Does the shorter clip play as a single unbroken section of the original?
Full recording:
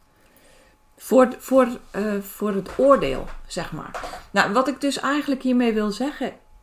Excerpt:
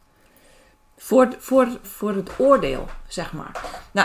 no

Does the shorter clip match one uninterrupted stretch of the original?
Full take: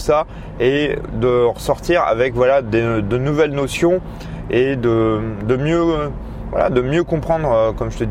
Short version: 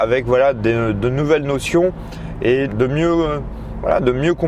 no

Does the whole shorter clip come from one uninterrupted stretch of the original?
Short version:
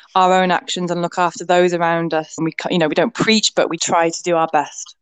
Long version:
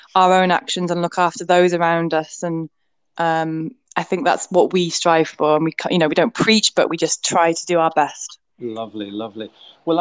no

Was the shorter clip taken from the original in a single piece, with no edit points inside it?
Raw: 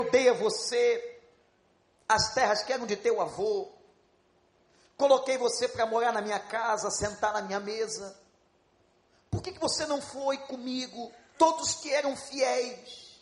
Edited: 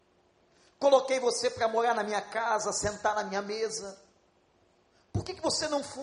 yes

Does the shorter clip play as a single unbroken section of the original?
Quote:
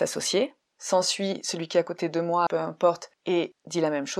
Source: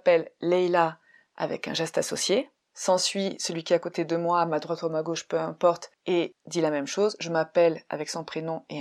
no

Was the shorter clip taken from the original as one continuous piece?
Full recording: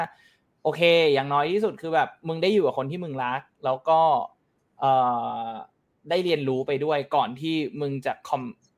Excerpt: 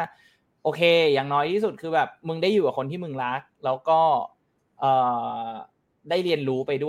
yes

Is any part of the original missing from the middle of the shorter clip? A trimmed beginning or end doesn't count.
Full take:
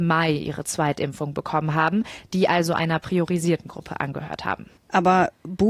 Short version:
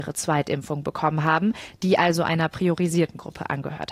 no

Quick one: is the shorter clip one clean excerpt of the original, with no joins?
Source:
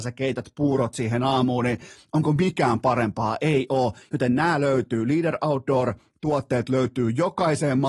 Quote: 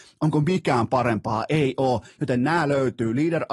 yes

